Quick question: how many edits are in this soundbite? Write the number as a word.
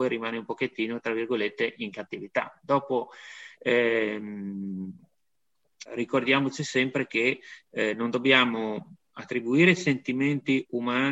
one